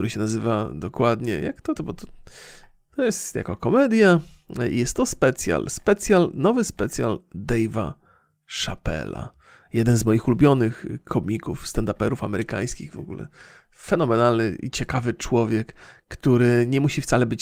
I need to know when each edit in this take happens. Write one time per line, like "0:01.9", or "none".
0:01.8